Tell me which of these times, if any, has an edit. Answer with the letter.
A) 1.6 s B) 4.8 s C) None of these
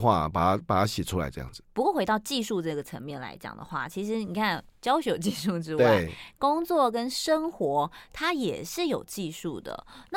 A